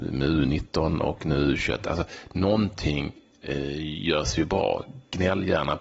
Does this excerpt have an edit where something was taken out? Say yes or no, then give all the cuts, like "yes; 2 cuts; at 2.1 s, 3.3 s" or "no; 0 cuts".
no; 0 cuts